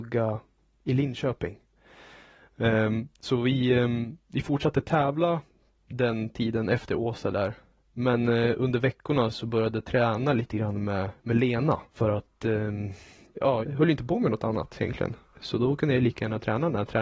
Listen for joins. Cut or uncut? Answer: cut